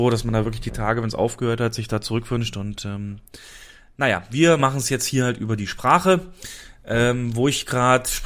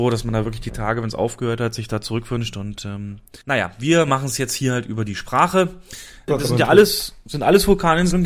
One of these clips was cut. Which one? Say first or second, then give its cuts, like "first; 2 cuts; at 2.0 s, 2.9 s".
second; 2 cuts; at 3.4 s, 6.3 s